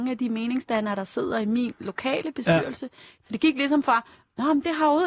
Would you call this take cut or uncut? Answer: cut